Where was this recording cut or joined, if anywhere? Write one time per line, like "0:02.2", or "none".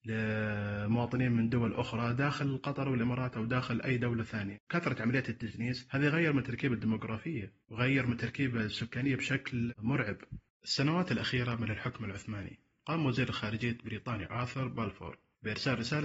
0:10.5